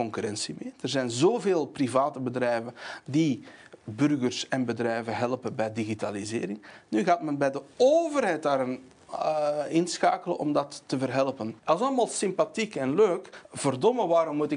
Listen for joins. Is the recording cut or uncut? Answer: cut